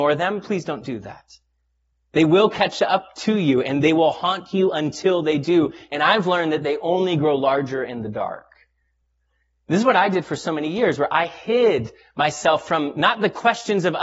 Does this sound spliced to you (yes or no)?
no